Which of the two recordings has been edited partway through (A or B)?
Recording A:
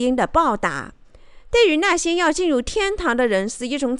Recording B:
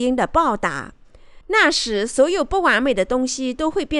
B